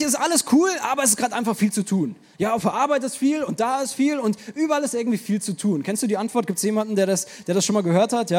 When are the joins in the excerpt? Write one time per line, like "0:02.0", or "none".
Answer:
none